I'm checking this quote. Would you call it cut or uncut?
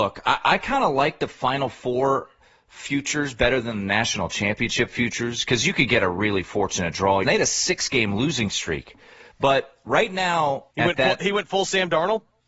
cut